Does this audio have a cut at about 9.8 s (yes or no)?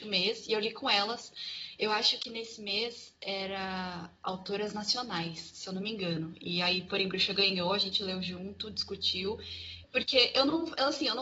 yes